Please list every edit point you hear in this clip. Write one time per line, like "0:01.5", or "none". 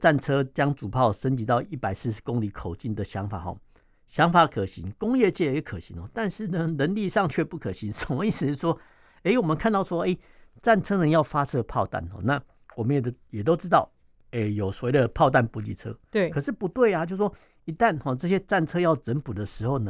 none